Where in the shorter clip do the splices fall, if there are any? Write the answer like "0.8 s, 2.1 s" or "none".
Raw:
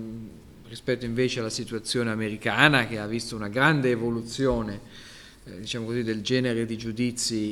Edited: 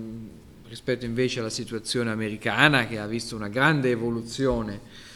none